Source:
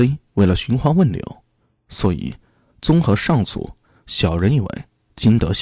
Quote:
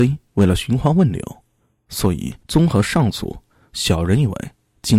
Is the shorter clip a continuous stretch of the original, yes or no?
no